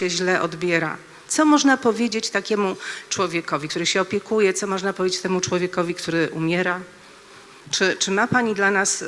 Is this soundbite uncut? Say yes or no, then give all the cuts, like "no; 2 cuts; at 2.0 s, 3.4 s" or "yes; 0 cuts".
yes; 0 cuts